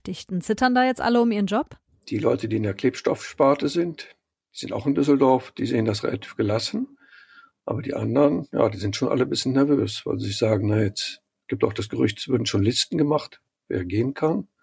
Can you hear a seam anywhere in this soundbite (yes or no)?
no